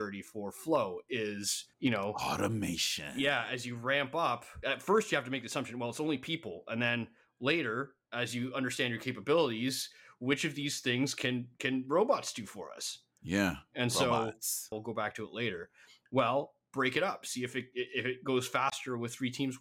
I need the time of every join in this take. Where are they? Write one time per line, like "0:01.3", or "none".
0:01.7
0:14.7